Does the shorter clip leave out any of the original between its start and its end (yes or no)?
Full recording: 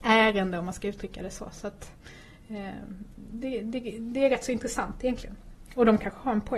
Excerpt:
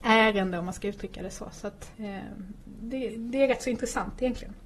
yes